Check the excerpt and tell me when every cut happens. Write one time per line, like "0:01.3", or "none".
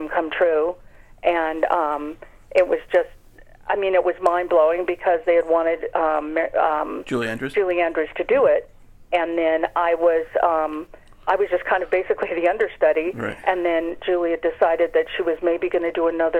none